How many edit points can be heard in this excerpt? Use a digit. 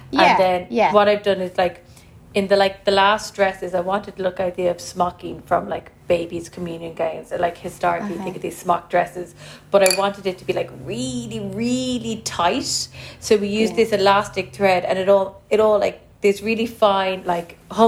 0